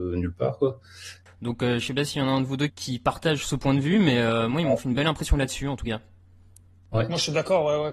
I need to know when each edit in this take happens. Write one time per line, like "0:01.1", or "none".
0:01.3
0:02.7